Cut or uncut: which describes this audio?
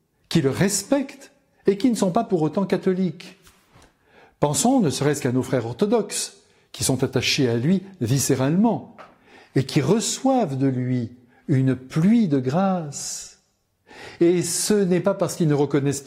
uncut